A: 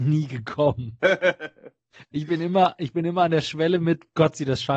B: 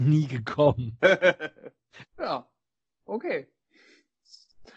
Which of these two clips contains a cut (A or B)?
B